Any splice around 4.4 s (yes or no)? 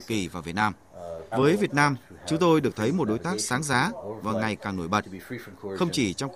no